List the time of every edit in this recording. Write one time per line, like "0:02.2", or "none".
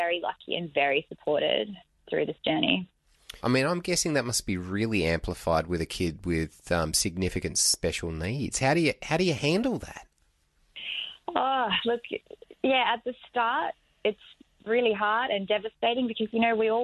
0:03.4